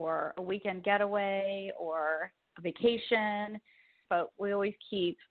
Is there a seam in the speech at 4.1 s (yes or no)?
yes